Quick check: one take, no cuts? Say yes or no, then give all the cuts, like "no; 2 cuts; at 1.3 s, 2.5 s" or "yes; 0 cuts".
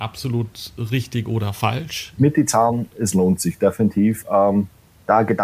no; 1 cut; at 2.2 s